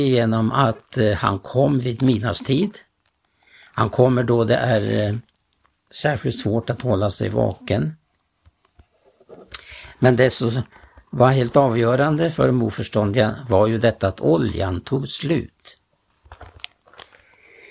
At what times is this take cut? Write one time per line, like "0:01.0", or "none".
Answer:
none